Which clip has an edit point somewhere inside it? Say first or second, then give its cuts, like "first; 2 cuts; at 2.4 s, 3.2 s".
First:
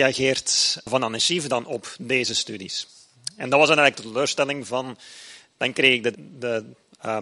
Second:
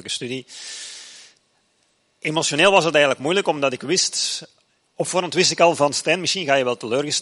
first; 1 cut; at 6.1 s